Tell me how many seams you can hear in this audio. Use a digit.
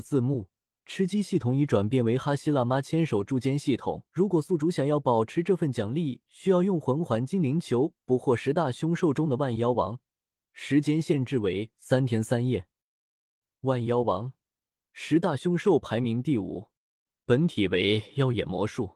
1